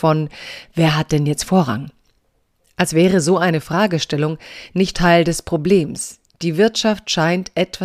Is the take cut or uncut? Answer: cut